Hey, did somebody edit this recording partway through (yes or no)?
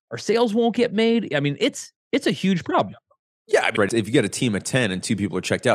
yes